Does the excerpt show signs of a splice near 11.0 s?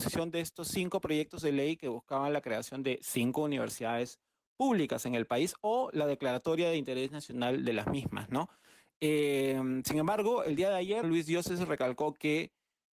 yes; 1 cut; at 11.0 s

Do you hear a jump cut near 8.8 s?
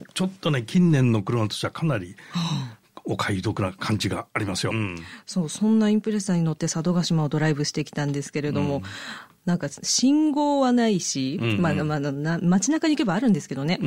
no; 1 cut; at 4.7 s

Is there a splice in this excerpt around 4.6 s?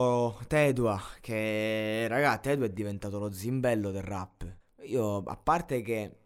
yes; 1 cut; at 4.6 s

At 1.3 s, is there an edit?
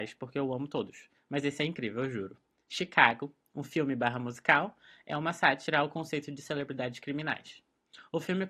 no; 0 cuts

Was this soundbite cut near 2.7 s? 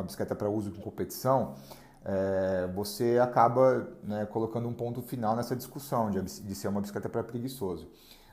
no; 0 cuts

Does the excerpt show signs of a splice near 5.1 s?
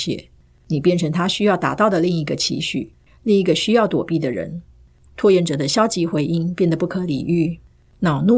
yes; 1 cut; at 5.1 s

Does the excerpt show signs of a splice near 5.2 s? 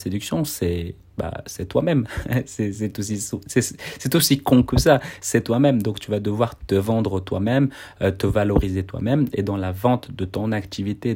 no; 0 cuts

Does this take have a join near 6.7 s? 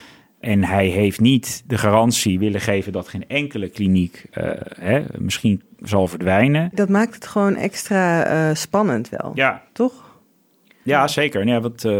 no; 0 cuts

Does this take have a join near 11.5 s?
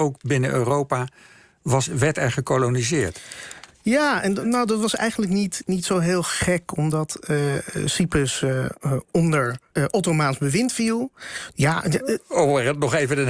yes; 2 cuts; at 9.7 s, 11.5 s

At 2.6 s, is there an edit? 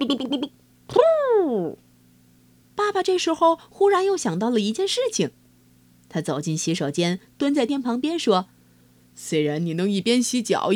yes; 2 cuts; at 2.6 s, 7.7 s

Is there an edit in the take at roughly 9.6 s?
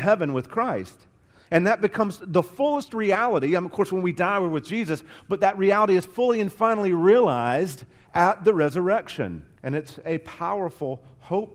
yes; 1 cut; at 9.6 s

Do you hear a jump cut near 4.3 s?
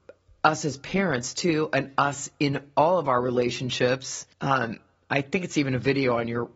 yes; 1 cut; at 4.3 s

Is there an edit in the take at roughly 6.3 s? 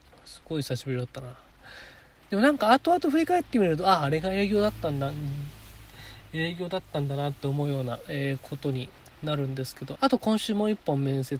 no; 2 cuts; at 2.2 s, 10.0 s

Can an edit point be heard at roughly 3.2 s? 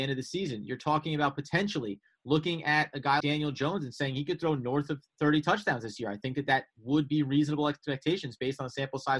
yes; 1 cut; at 3.2 s

